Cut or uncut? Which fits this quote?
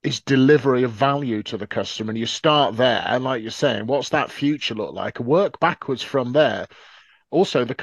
uncut